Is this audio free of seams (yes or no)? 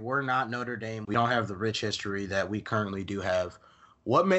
no